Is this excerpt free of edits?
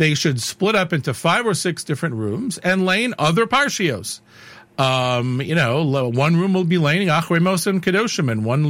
yes; 0 cuts

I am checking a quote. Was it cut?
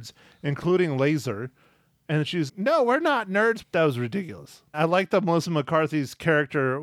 yes; 3 cuts; at 2.5 s, 3.6 s, 4.7 s

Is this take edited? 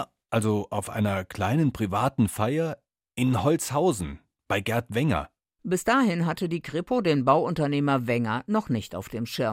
yes; 1 cut; at 5.5 s

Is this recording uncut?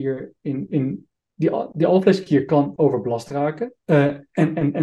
no; 1 cut; at 3.8 s

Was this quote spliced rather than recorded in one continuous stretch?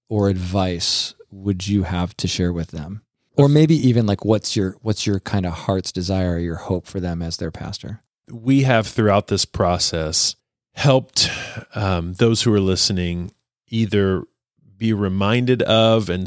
no; 0 cuts

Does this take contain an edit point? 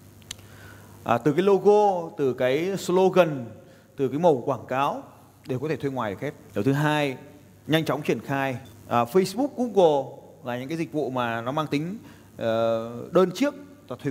yes; 2 cuts; at 6.5 s, 8.7 s

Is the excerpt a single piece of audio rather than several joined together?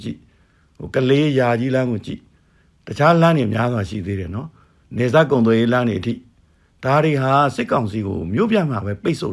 yes; 0 cuts

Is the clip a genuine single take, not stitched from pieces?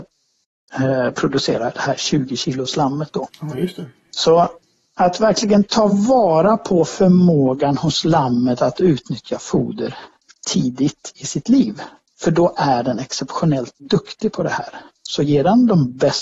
yes; 0 cuts

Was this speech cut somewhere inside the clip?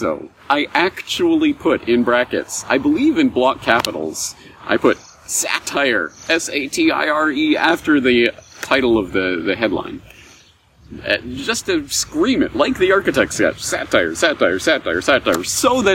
no; 0 cuts

